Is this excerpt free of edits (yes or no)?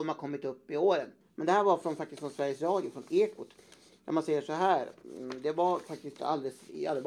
no